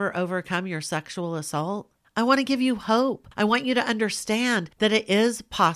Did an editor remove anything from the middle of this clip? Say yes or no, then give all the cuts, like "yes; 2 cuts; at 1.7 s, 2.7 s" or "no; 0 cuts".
no; 0 cuts